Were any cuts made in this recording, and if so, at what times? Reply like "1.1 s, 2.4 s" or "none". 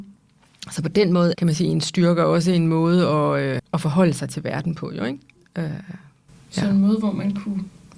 1.3 s, 3.6 s